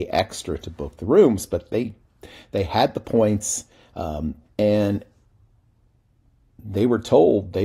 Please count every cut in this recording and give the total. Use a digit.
1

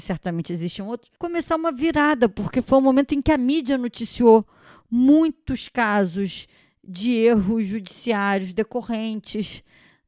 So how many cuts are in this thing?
1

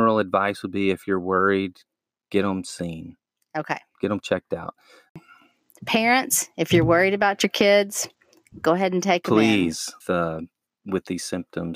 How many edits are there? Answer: 1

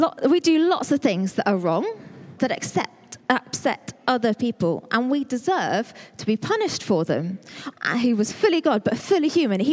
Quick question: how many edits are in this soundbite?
2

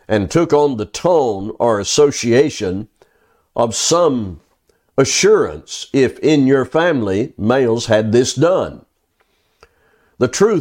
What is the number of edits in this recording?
0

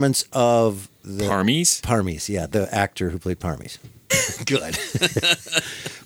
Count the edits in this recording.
1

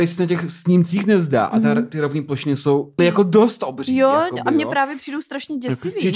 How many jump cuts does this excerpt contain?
1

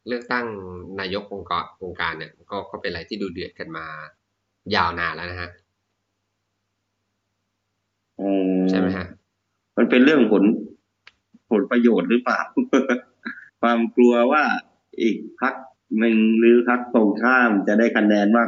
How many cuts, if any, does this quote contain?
1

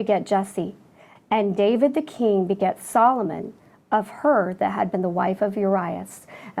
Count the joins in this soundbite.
1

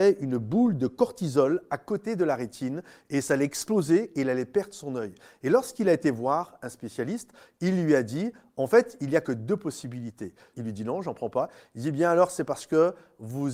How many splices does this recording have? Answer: 1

